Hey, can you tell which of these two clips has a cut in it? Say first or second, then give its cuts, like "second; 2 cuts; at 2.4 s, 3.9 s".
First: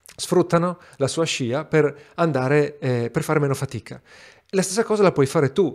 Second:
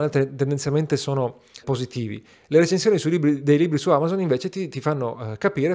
second; 1 cut; at 1.6 s